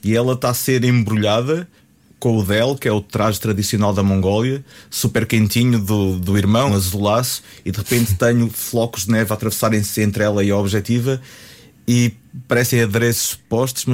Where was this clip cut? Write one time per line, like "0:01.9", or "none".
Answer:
0:06.7